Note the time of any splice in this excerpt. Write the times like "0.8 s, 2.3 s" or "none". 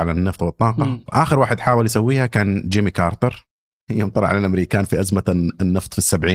1.1 s